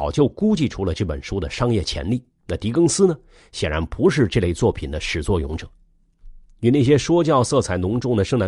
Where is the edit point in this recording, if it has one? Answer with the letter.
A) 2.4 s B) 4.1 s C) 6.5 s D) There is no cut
A